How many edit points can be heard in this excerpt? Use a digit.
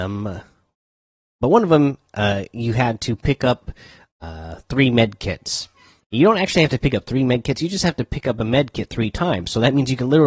0